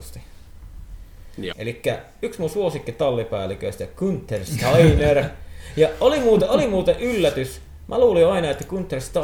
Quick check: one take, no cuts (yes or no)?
no